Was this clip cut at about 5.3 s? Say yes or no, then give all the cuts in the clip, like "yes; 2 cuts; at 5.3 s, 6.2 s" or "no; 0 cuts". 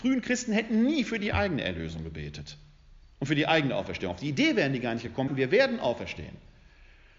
yes; 1 cut; at 5.3 s